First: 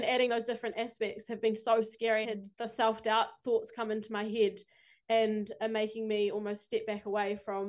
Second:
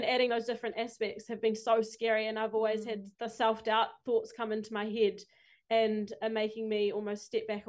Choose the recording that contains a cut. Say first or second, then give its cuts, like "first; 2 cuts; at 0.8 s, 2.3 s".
first; 1 cut; at 2.2 s